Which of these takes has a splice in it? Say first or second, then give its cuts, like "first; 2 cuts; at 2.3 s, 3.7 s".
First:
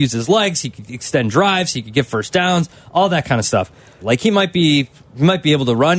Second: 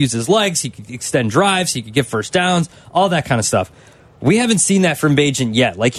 first; 1 cut; at 4.0 s